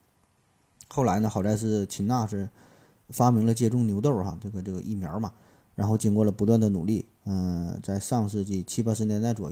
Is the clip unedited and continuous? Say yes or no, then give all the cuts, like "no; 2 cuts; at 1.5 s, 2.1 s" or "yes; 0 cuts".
yes; 0 cuts